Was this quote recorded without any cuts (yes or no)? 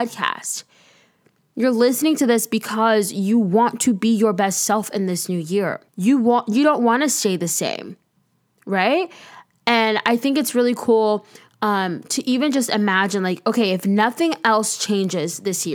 no